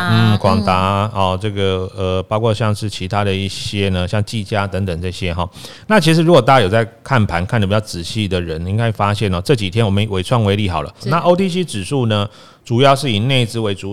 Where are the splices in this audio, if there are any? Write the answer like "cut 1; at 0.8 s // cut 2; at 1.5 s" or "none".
cut 1; at 11.0 s